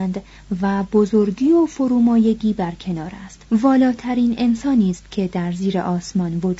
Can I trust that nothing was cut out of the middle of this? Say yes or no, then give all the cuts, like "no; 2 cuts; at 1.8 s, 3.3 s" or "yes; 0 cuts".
no; 1 cut; at 3.4 s